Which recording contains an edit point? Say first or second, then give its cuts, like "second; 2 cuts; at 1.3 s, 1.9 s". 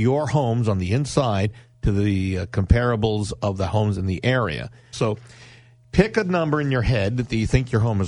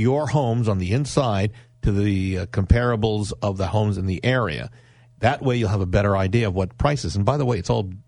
first; 1 cut; at 4.9 s